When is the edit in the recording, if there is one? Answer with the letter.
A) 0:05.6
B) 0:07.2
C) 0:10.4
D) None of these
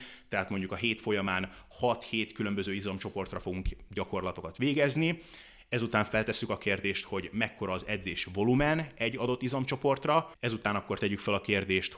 C